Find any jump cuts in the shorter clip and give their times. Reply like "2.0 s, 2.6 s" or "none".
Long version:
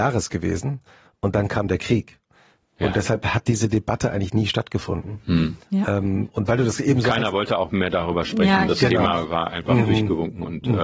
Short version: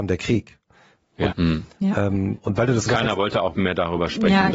1.3 s, 2.9 s